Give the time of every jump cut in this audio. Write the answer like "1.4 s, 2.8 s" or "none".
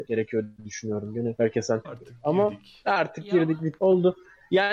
1.8 s